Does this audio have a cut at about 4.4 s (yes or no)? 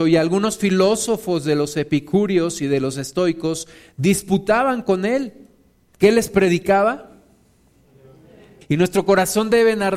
no